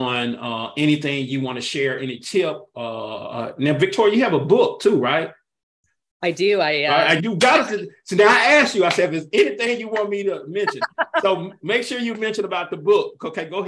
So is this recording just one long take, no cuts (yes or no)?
no